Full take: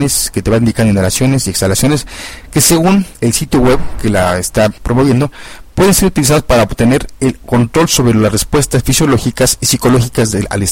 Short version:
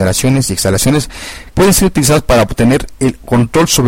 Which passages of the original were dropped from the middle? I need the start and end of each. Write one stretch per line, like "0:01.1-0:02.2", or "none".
0:02.5-0:05.7